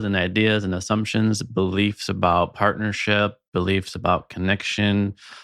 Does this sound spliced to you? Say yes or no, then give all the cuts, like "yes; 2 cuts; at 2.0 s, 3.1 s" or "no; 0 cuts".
no; 0 cuts